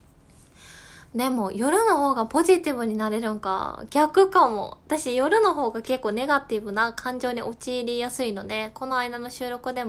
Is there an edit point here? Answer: no; 0 cuts

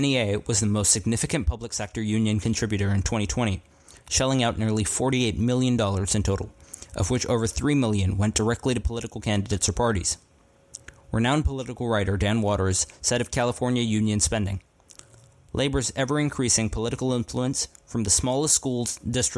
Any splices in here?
no; 0 cuts

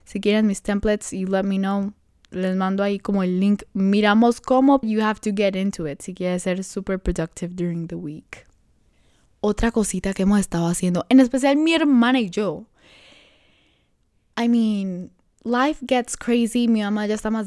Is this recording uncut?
no; 1 cut; at 4.8 s

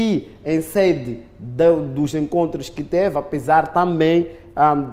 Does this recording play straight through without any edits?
yes; 0 cuts

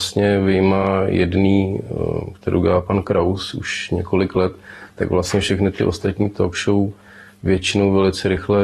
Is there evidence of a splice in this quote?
no; 0 cuts

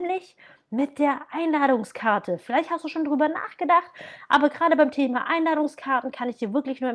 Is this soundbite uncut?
yes; 0 cuts

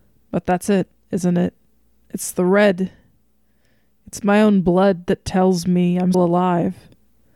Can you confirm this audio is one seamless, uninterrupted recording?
no; 1 cut; at 6.1 s

